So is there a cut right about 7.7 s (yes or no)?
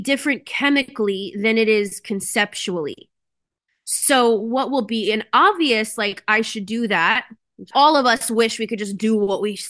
yes